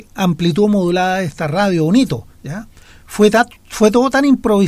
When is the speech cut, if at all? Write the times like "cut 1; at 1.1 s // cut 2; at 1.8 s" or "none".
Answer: none